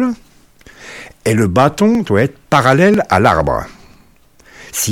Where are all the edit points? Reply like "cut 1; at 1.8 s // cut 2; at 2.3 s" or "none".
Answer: none